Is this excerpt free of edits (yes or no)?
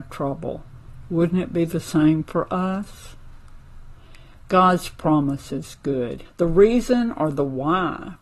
no